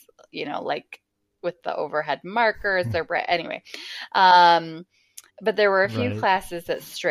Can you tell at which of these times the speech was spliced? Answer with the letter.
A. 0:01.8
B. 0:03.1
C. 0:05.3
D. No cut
C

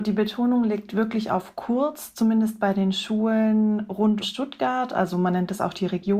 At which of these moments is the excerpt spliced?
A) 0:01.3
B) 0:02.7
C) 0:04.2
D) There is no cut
C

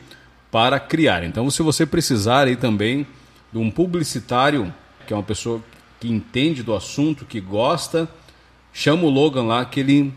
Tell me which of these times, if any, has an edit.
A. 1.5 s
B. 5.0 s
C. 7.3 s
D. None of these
B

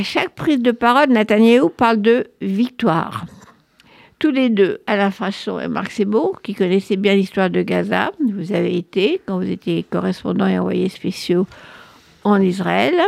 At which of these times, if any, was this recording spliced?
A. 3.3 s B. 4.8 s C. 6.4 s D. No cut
D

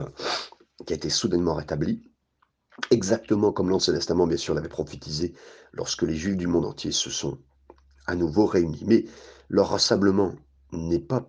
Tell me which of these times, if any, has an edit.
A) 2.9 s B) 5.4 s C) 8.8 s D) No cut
D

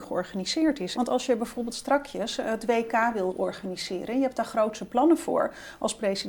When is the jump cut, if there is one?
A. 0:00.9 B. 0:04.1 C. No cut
A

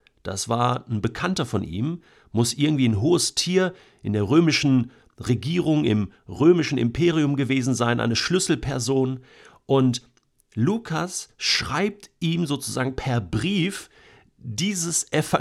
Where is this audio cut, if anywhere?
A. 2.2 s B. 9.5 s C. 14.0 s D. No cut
D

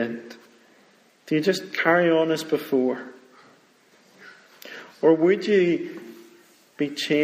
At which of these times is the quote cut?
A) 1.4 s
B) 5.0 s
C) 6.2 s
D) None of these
D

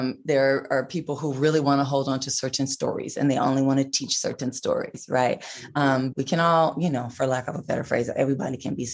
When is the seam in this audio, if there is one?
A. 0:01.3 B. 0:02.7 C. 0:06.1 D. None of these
C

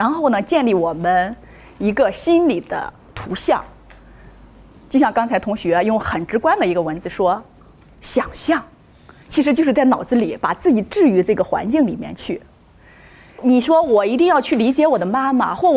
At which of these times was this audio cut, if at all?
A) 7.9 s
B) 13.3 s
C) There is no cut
B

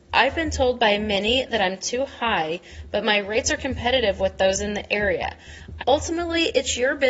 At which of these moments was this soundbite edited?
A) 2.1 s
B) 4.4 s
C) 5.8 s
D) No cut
C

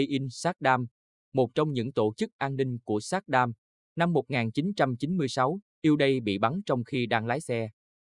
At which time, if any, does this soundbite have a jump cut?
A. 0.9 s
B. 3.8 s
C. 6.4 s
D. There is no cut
D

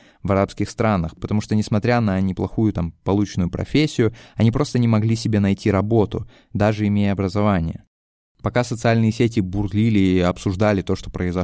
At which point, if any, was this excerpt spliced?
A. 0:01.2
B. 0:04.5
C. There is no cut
C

